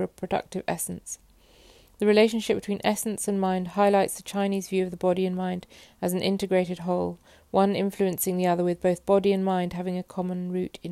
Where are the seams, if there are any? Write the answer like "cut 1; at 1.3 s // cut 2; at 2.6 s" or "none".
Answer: none